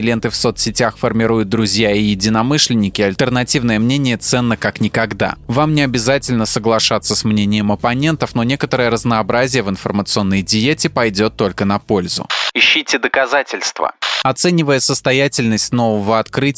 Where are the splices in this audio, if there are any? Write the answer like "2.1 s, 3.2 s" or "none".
none